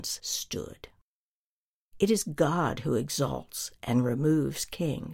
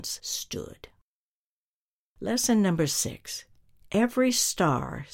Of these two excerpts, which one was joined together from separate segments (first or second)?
first